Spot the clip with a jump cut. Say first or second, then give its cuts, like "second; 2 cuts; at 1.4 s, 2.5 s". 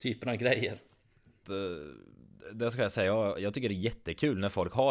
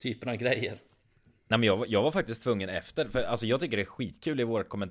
first; 1 cut; at 1.4 s